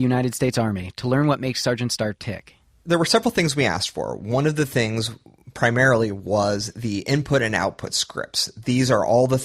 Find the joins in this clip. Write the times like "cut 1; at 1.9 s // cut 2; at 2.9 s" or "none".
none